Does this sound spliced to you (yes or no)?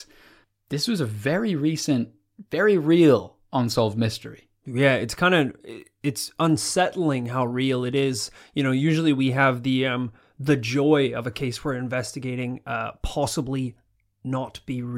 no